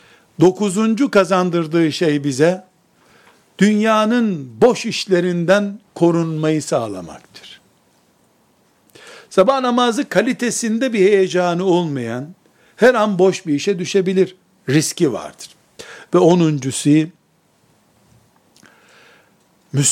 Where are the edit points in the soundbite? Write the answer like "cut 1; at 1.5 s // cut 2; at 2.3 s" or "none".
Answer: none